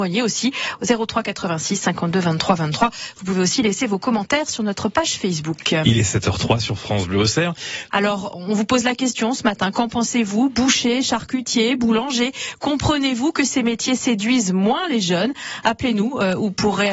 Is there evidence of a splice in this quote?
yes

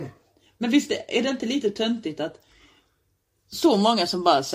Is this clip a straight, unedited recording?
yes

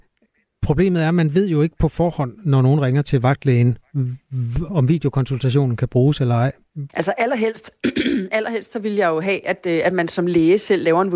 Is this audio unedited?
no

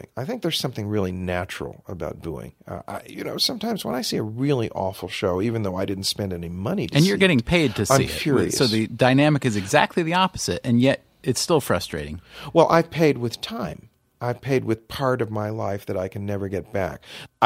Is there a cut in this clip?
no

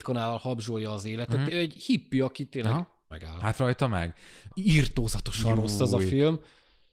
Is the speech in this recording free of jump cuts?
no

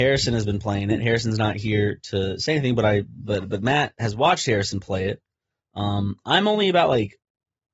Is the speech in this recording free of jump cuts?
yes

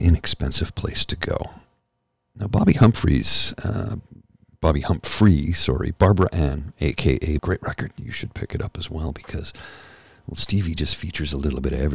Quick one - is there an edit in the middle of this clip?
yes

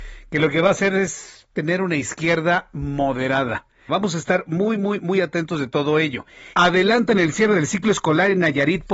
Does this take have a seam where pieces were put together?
yes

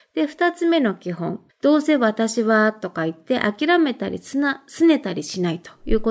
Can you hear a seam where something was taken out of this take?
yes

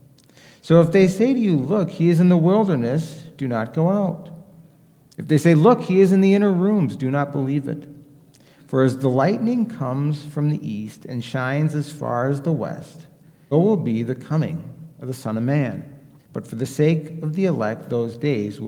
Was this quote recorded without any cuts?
no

